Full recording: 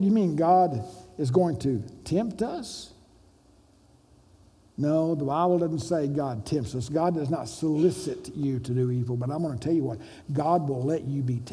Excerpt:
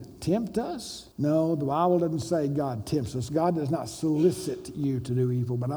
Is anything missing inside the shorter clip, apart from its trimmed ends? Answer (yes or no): yes